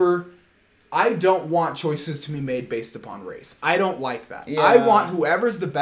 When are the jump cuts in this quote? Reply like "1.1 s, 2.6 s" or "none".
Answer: none

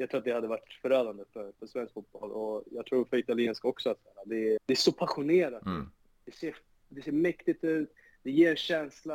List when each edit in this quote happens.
4.6 s, 6.1 s

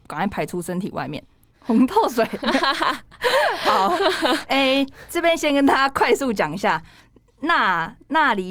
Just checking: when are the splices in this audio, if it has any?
1.5 s

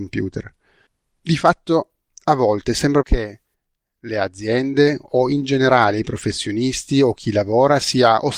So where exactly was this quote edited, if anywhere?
3.0 s

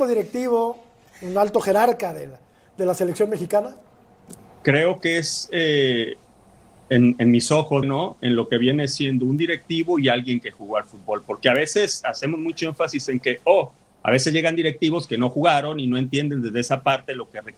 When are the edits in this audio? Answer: 7.8 s

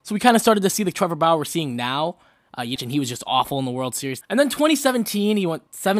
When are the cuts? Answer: 2.8 s, 4.2 s

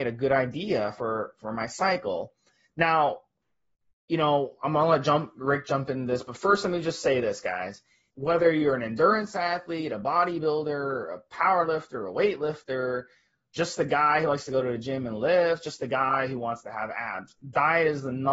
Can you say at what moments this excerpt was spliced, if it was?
8.1 s

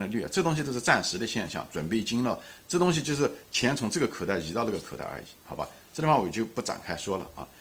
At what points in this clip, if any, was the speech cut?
none

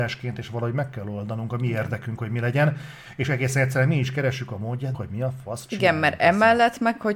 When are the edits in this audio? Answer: 2.2 s, 4.9 s

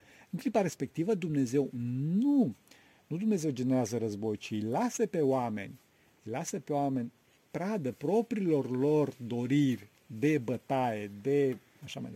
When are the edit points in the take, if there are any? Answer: none

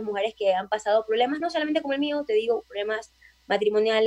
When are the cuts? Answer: none

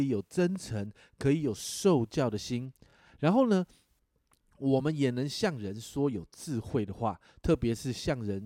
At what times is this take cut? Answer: none

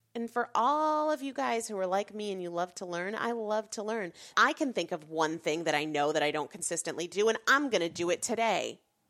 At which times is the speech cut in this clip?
4.3 s

